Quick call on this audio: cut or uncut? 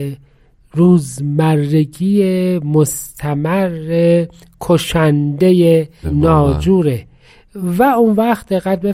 cut